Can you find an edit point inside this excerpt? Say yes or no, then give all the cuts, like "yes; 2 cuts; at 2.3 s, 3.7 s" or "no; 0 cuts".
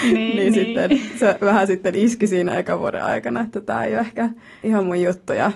yes; 1 cut; at 4.6 s